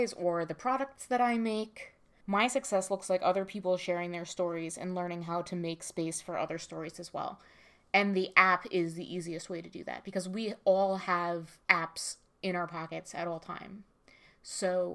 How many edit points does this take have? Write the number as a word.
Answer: two